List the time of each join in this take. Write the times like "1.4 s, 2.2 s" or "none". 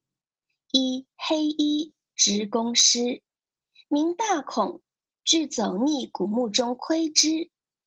none

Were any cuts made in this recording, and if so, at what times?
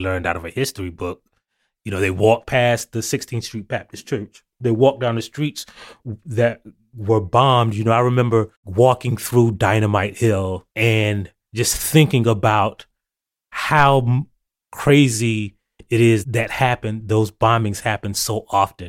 8.5 s, 10.7 s, 16.2 s

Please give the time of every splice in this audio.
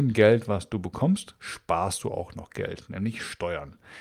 none

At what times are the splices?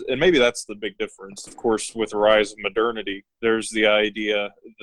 1.5 s, 3.3 s

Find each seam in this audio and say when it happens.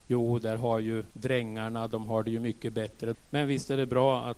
1.1 s, 3.1 s

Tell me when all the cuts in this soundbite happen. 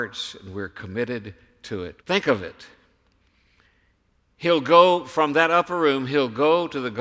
2.0 s

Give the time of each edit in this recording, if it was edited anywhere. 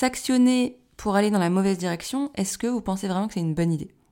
none

